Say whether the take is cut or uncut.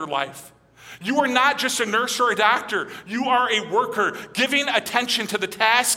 uncut